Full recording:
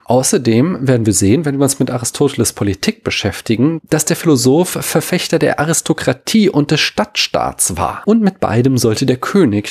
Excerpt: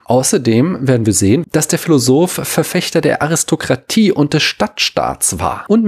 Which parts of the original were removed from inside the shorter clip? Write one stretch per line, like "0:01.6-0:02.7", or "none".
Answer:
0:01.4-0:03.8